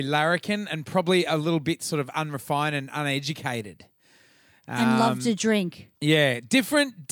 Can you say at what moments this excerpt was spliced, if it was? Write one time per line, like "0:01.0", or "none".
0:06.0